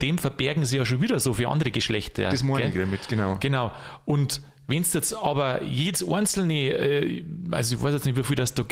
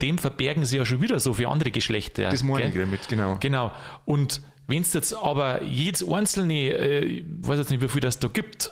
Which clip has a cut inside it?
second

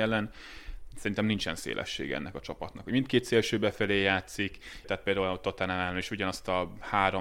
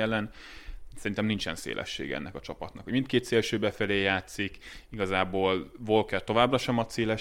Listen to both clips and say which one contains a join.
first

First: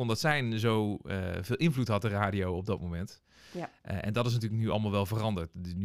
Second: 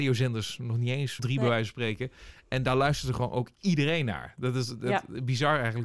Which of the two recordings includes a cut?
second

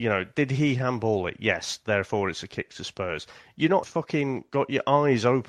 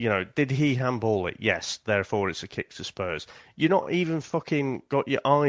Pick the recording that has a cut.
first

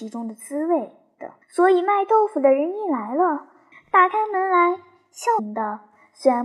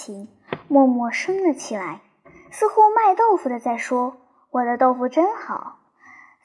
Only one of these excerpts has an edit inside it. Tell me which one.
first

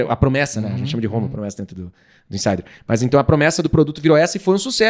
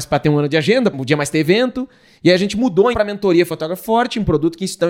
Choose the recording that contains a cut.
second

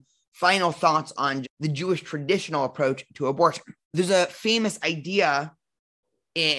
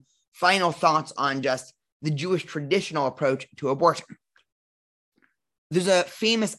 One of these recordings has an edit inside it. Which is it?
first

